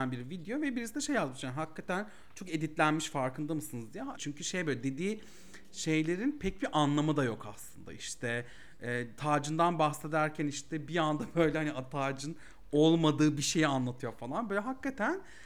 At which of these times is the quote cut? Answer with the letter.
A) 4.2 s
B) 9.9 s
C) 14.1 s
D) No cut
A